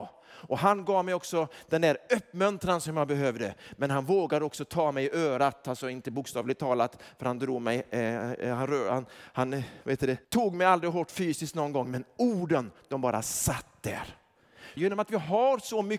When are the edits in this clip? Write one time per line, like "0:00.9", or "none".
0:10.2
0:14.8